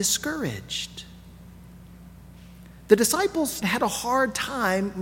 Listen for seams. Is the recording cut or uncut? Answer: cut